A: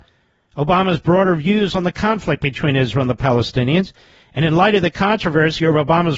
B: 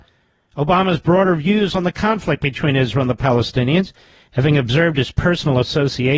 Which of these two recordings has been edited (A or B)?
B